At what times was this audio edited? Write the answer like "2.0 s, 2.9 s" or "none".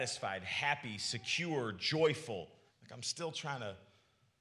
2.7 s